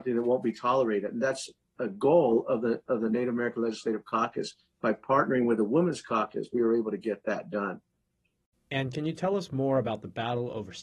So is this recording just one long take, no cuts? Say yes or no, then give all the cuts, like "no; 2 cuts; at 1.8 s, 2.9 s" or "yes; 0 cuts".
yes; 0 cuts